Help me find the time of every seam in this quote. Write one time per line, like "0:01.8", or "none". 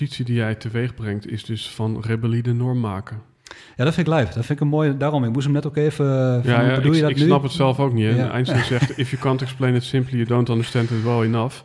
none